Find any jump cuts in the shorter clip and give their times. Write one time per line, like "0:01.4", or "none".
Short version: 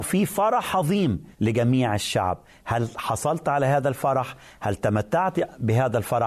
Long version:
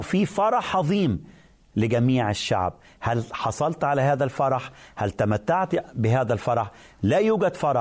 0:01.3